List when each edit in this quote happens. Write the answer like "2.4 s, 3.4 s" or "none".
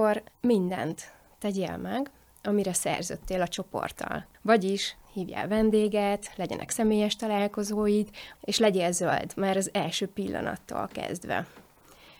4.3 s, 8.4 s